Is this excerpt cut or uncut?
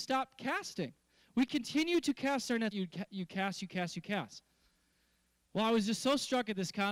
cut